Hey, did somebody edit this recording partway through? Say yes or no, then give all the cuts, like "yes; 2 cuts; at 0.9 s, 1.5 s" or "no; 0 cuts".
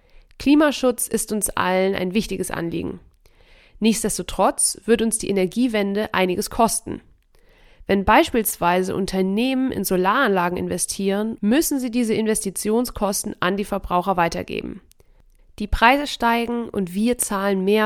yes; 2 cuts; at 11.4 s, 15.4 s